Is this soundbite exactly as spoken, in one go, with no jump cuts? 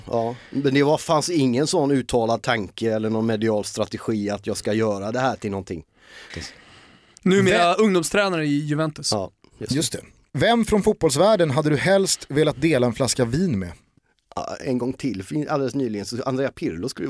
no; 2 cuts; at 6.3 s, 14.6 s

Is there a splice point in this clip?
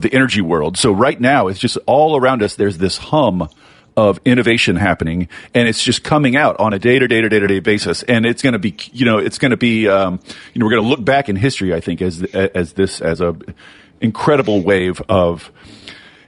no; 0 cuts

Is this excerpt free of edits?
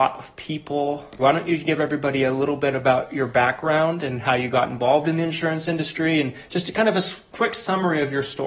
no; 1 cut; at 1.2 s

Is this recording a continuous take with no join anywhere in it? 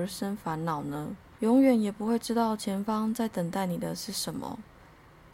no; 1 cut; at 1.4 s

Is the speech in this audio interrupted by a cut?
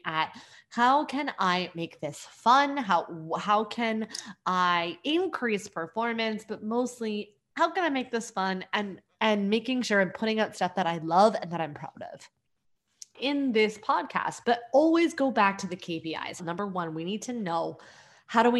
yes; 3 cuts; at 13.1 s, 14.4 s, 16.4 s

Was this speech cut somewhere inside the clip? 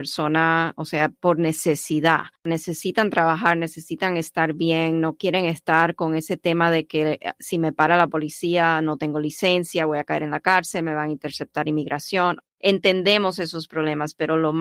yes; 1 cut; at 12.5 s

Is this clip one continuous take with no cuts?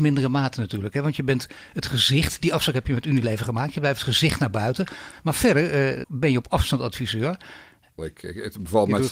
no; 2 cuts; at 6.0 s, 8.0 s

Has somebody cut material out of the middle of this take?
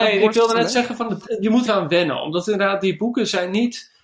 yes; 1 cut; at 1.7 s

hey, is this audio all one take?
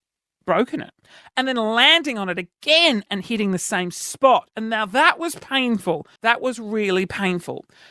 no; 1 cut; at 6.2 s

